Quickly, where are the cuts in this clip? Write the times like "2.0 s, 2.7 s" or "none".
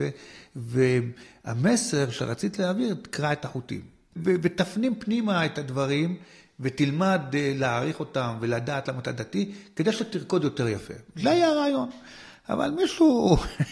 4.2 s

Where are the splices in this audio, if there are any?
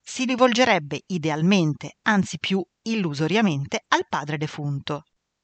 none

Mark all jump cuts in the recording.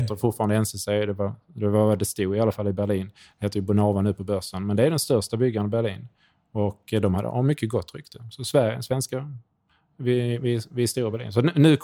none

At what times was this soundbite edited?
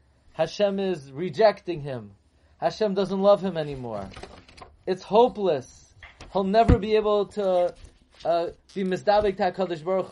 none

